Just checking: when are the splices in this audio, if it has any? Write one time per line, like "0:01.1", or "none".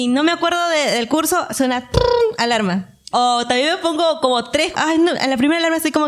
0:03.1
0:04.7